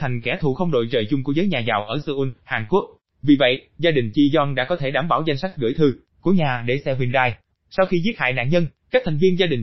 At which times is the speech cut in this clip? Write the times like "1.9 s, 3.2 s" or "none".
7.5 s